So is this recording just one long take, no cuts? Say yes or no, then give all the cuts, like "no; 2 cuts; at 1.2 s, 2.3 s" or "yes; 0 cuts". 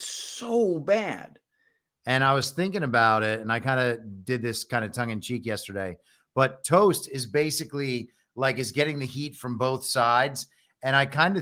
no; 1 cut; at 2.0 s